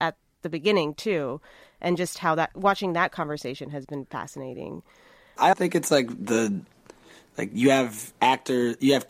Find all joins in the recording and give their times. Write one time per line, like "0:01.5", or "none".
0:05.5